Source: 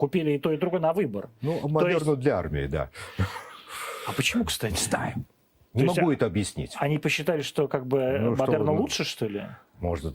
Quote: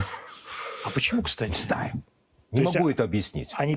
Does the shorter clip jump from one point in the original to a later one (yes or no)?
no